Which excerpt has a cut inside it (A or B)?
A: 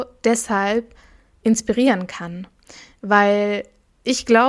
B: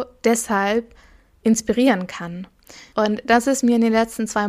B